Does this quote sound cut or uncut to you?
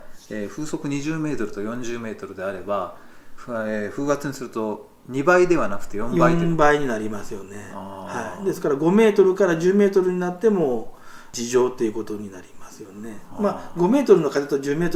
uncut